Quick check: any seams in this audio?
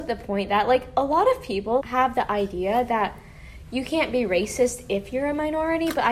yes; 1 cut; at 1.8 s

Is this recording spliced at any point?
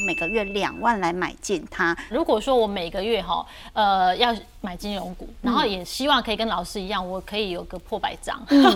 yes; 1 cut; at 2.1 s

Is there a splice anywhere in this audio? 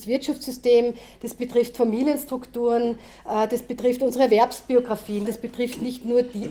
yes; 1 cut; at 5.3 s

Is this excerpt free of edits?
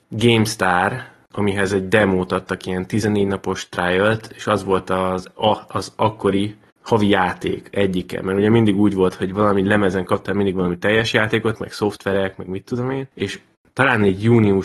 no; 1 cut; at 11.6 s

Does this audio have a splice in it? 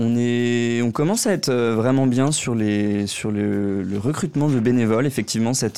no; 0 cuts

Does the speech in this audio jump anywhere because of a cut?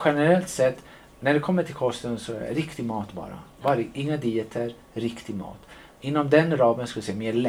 no; 0 cuts

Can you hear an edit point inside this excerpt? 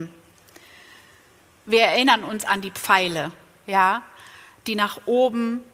yes; 1 cut; at 1.6 s

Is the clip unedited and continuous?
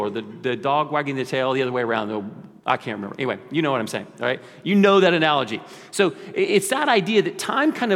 yes; 0 cuts

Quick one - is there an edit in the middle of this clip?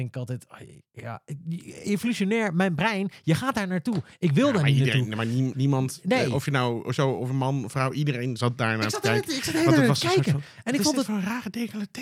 yes; 1 cut; at 5.5 s

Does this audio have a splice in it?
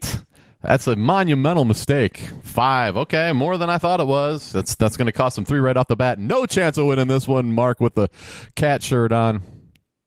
no; 0 cuts

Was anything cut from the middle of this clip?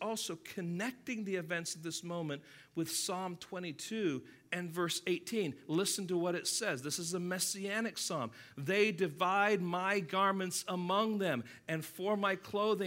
no; 0 cuts

